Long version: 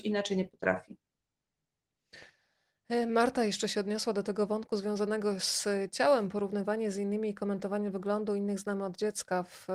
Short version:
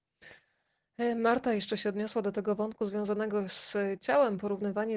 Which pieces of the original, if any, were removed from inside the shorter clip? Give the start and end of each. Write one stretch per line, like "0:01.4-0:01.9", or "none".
none